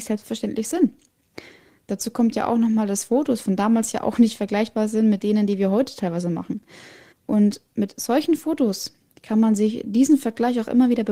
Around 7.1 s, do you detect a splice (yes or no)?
yes